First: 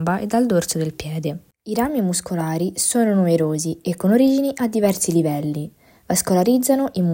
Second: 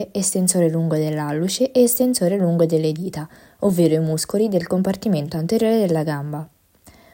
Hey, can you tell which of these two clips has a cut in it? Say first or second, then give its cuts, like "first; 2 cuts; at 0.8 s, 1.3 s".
first; 1 cut; at 1.5 s